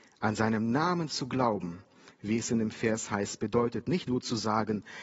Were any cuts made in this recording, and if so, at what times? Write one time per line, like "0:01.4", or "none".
0:04.1